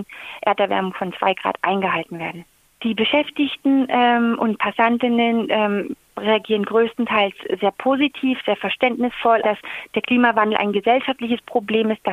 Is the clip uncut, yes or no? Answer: no